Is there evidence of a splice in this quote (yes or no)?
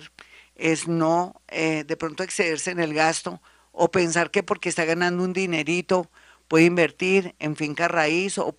no